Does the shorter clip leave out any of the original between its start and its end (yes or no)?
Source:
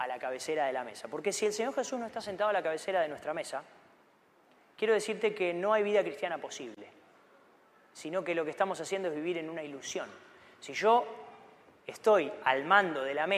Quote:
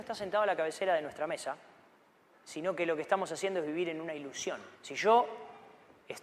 yes